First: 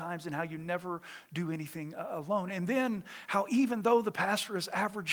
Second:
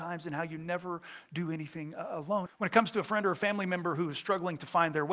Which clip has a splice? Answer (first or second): second